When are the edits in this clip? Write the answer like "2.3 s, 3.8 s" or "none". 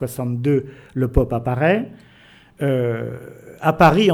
none